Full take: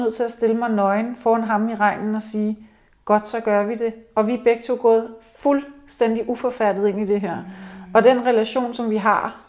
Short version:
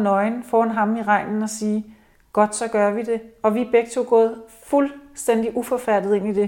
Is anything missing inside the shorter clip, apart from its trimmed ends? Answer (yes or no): no